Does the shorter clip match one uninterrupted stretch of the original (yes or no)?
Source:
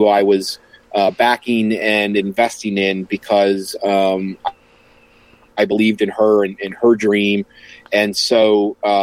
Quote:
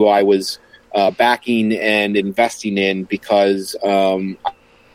yes